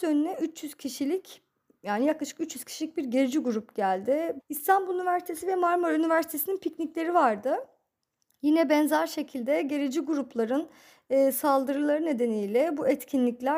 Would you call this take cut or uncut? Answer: cut